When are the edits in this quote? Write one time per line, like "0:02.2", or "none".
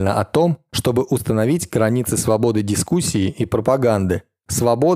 none